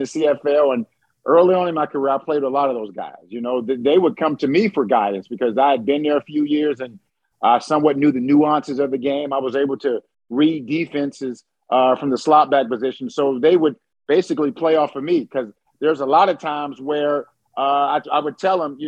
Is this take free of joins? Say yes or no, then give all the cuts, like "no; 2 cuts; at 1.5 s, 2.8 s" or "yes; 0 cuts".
yes; 0 cuts